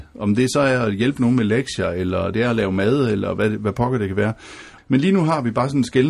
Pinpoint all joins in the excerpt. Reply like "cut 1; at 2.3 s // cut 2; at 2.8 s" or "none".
cut 1; at 4.8 s